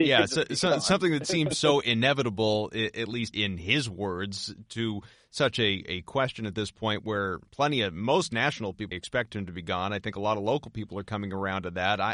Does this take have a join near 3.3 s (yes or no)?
yes